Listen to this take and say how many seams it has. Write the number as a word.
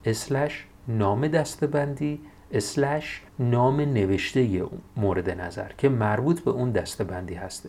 one